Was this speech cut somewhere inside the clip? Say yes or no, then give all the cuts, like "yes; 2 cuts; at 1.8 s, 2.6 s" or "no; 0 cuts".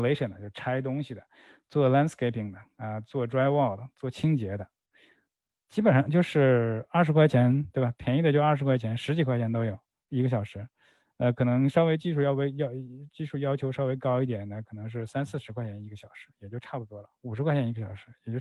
no; 0 cuts